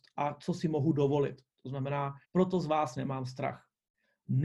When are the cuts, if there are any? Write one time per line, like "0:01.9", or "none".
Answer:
0:02.2